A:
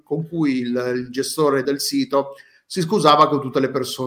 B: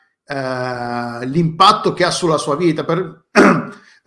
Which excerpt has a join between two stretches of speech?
A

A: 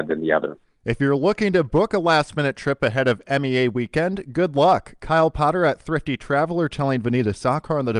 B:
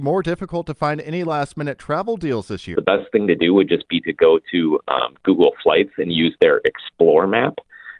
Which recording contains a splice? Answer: B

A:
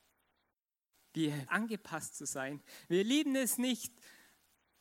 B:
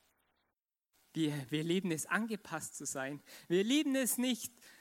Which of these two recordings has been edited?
A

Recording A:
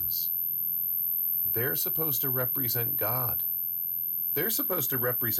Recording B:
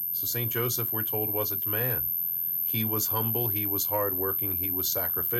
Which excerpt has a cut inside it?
B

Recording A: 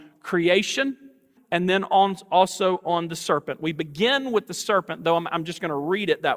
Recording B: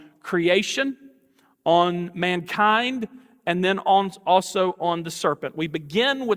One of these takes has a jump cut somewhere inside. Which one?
A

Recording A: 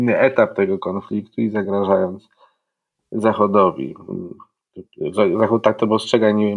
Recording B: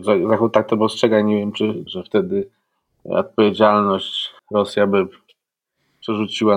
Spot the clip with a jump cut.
B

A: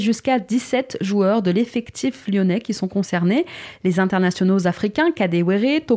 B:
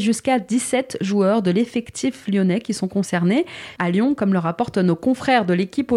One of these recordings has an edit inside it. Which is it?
B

